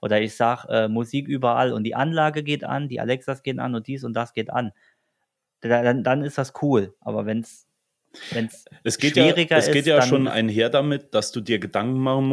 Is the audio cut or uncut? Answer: uncut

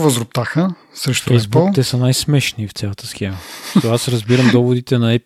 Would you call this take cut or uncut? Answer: uncut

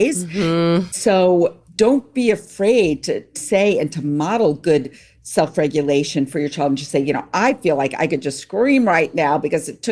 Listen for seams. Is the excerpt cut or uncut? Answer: uncut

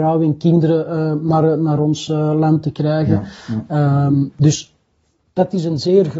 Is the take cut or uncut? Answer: uncut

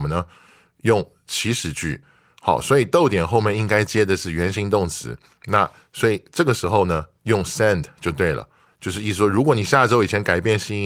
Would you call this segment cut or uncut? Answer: uncut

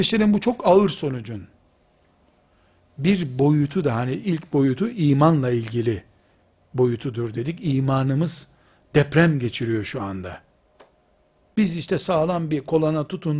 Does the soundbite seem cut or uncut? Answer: uncut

